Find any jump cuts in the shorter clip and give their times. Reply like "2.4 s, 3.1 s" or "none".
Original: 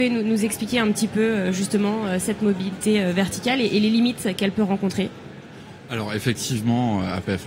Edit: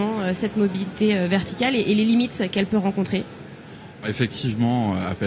4.0 s